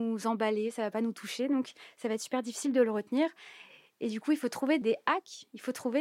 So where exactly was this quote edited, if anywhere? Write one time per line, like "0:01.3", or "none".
0:04.8